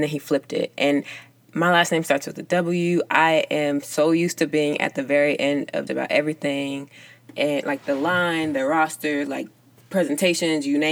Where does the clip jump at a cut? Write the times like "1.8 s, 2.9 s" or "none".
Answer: 5.9 s